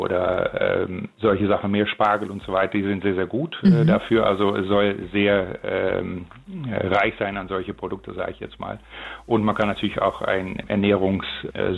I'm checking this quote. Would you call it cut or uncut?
uncut